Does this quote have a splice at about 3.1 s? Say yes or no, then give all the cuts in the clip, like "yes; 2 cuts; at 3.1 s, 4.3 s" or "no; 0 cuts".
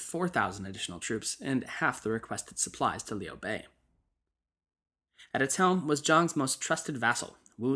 no; 1 cut; at 5.3 s